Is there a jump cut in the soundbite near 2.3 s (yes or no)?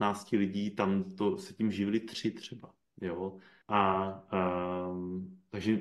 no